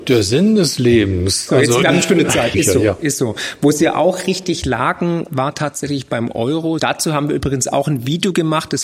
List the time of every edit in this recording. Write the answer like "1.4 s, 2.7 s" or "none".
2.5 s, 6.8 s

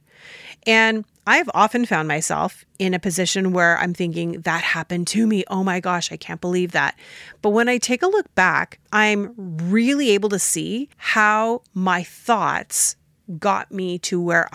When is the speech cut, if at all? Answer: 8.9 s, 10.9 s

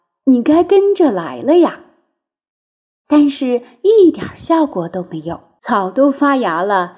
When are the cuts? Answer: 5.6 s

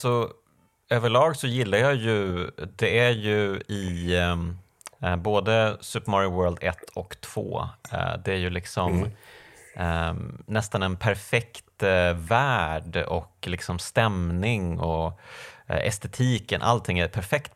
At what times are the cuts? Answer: 4.9 s

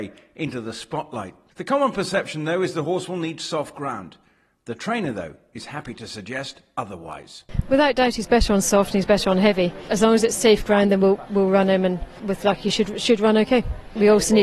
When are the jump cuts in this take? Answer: none

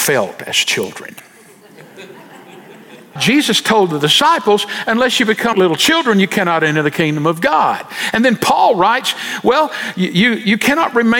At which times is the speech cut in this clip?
3.2 s, 5.5 s

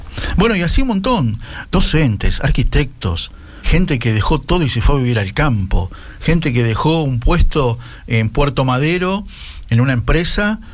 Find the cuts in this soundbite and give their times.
3.6 s

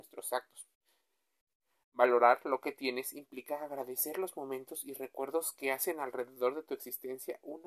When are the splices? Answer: none

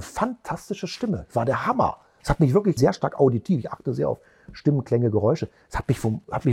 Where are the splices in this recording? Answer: 2.8 s

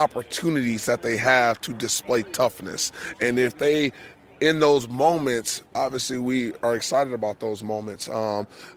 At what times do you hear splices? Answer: 5.7 s

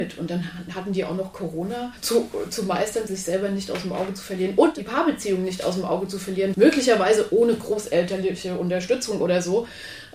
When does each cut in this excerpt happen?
3.1 s, 6.5 s

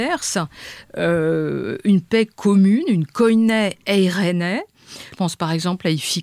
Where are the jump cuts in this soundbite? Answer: 5.1 s

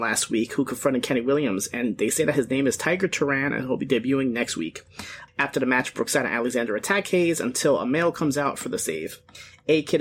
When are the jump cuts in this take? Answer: 5.3 s

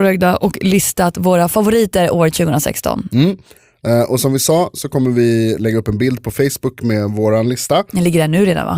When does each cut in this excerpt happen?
none

